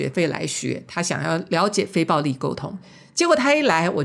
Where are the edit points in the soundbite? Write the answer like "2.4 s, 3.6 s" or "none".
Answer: none